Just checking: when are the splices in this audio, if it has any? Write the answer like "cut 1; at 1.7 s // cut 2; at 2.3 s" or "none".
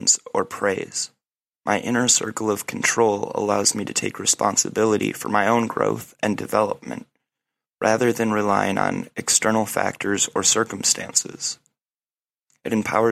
cut 1; at 1.5 s